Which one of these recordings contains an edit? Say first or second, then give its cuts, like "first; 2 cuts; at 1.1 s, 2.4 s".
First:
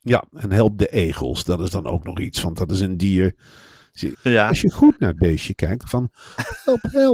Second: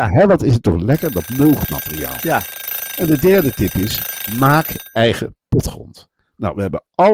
first; 2 cuts; at 4.1 s, 5.8 s